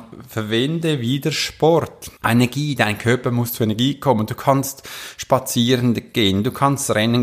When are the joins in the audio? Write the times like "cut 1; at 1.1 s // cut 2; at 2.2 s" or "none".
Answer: cut 1; at 2.2 s